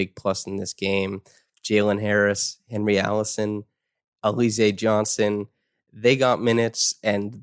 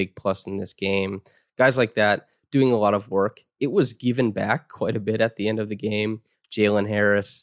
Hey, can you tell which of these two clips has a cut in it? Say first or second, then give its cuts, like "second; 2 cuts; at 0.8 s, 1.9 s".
first; 1 cut; at 1.5 s